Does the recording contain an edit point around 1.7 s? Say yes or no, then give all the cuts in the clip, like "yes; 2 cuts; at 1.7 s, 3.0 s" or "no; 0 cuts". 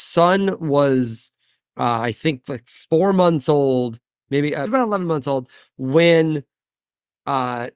no; 1 cut; at 4.7 s